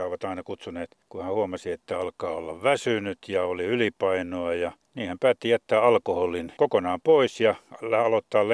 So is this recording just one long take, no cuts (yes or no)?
no